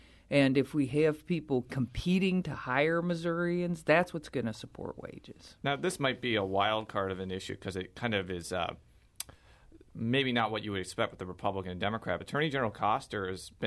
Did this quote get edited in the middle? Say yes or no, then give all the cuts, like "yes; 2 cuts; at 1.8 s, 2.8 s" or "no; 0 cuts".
yes; 1 cut; at 12.2 s